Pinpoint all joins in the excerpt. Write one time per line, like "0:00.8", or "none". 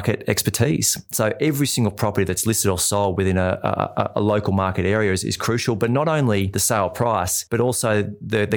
none